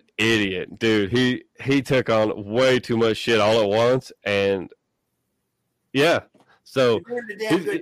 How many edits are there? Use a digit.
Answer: 0